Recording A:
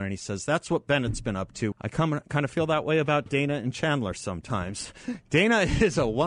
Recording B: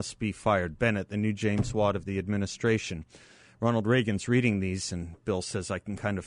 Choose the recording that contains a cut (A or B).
A